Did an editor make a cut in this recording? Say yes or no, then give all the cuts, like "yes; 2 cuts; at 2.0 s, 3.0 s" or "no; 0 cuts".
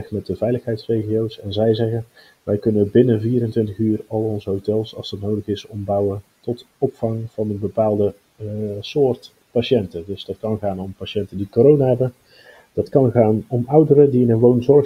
no; 0 cuts